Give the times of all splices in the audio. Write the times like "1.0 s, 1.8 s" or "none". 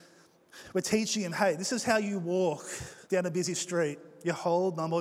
3.0 s